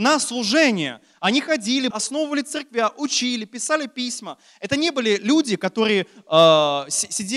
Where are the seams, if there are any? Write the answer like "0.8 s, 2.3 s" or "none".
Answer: 1.9 s